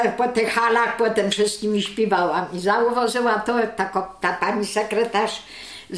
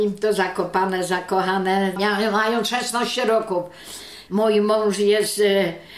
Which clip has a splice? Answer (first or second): second